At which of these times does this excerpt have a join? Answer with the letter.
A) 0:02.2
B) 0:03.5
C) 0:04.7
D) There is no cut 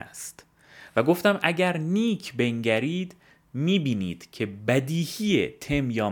D